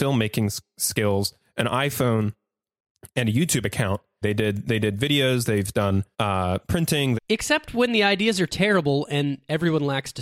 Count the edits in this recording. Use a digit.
3